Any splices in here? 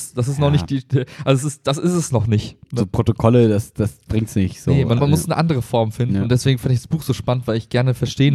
yes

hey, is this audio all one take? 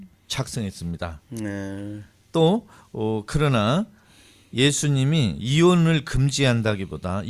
yes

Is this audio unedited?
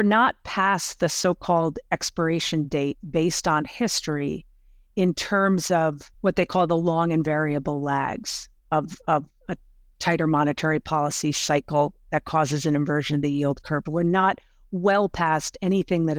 no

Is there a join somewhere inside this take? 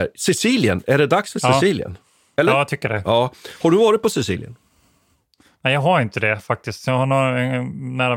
no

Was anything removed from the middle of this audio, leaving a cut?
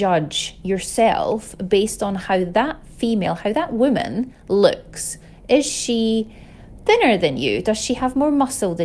no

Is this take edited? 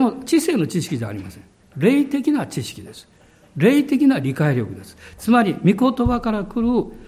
no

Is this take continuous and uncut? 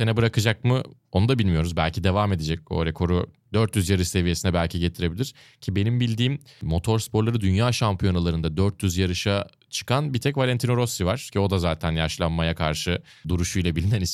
yes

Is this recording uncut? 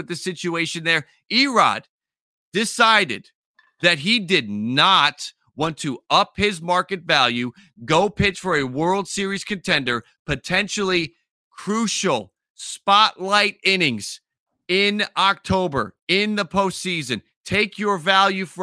yes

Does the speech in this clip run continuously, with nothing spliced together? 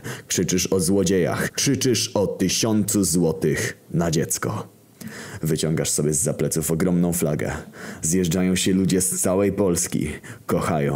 no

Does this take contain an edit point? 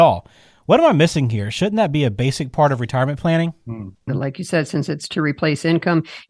yes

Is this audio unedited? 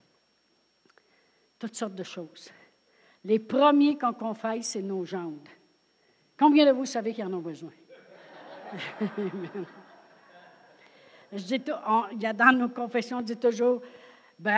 yes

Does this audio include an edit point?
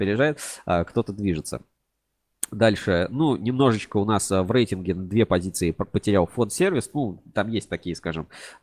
no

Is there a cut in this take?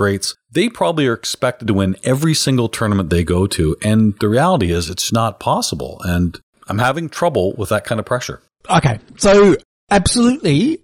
yes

